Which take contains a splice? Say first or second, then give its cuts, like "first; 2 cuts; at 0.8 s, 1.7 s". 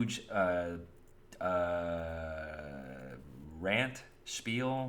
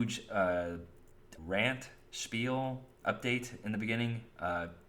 second; 2 cuts; at 1.4 s, 3.0 s